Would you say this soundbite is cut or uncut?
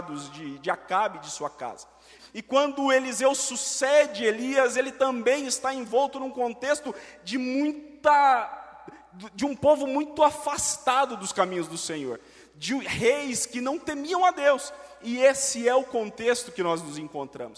cut